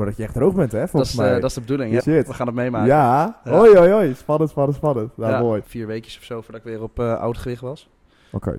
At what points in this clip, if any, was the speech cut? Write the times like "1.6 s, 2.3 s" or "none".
2.0 s, 5.6 s